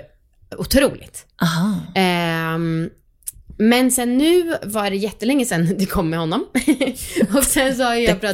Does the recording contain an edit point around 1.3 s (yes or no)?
no